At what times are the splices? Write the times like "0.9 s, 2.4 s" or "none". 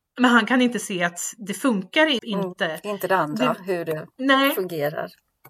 2.2 s